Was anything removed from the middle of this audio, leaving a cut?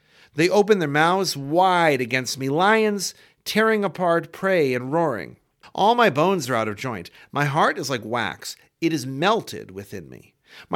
yes; 1 cut; at 5.6 s

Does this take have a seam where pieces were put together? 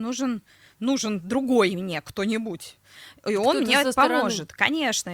no; 0 cuts

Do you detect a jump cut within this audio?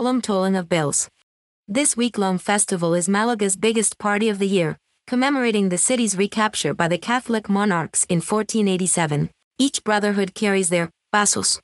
yes; 2 cuts; at 1.5 s, 9.5 s

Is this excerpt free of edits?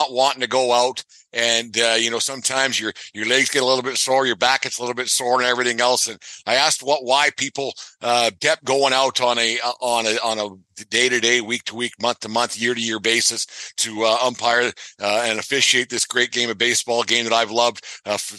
no; 1 cut; at 8.4 s

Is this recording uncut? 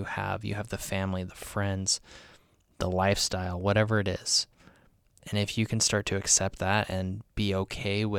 yes; 0 cuts

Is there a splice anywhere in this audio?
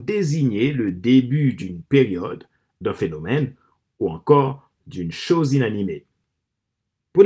no; 0 cuts

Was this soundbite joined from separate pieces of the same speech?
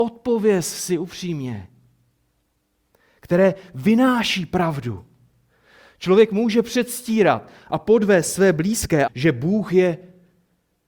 yes; 1 cut; at 9.1 s

